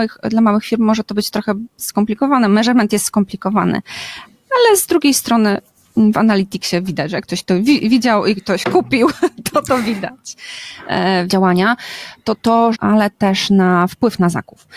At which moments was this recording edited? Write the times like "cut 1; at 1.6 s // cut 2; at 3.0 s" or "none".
cut 1; at 11.3 s // cut 2; at 12.7 s